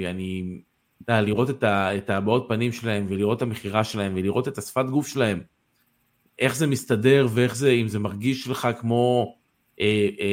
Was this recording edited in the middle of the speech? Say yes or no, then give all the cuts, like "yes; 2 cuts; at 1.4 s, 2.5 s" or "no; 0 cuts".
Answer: no; 0 cuts